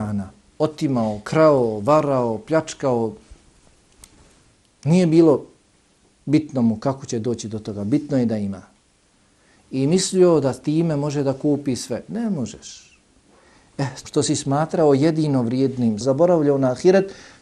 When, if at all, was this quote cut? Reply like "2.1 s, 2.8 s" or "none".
14.0 s, 16.0 s